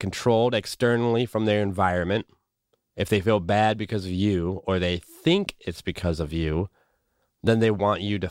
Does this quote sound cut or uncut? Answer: uncut